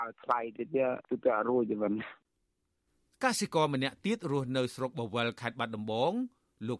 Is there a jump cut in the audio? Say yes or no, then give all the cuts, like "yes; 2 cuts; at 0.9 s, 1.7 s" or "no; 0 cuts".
yes; 1 cut; at 1.0 s